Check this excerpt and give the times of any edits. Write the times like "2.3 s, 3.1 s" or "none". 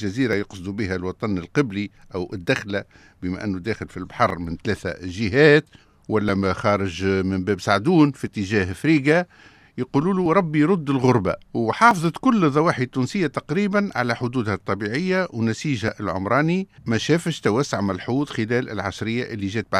11.4 s, 16.8 s